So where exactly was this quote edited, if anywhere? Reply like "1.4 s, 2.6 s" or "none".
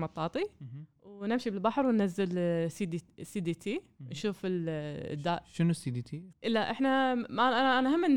6.3 s